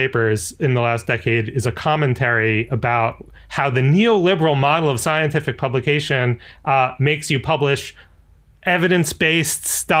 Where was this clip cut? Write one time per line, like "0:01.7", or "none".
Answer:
none